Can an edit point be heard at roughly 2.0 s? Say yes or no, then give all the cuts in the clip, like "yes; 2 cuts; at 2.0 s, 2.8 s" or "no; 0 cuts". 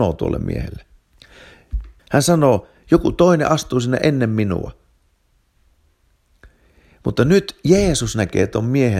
yes; 1 cut; at 2.0 s